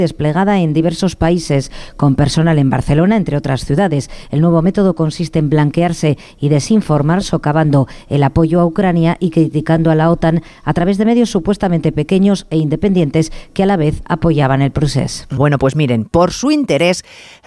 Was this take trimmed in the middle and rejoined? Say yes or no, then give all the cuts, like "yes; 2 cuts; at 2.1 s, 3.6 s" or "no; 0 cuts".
yes; 1 cut; at 15.4 s